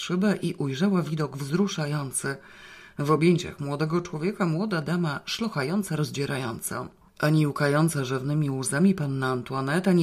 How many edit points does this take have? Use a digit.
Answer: 0